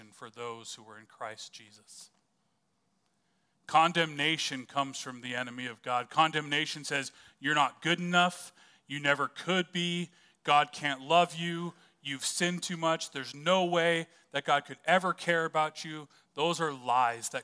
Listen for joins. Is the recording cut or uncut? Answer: uncut